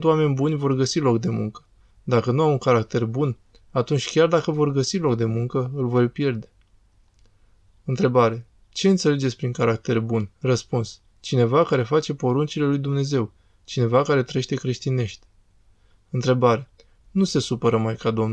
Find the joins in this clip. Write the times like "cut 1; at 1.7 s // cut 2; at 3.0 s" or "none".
cut 1; at 10.3 s // cut 2; at 17.0 s

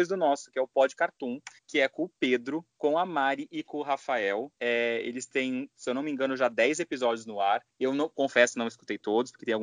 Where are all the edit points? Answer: none

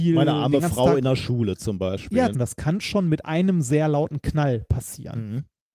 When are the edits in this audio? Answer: cut 1; at 2.3 s

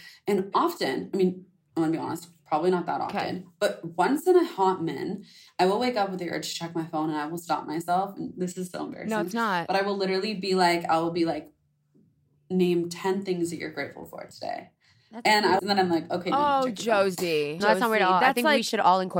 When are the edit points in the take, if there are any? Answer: cut 1; at 15.6 s // cut 2; at 17.6 s

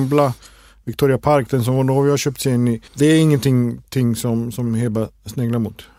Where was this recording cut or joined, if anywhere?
cut 1; at 2.9 s

